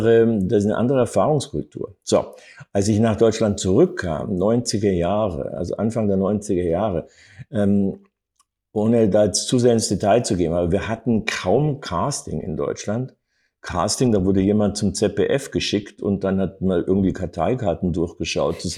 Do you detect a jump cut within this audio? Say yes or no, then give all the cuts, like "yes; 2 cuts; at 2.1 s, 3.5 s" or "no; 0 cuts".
no; 0 cuts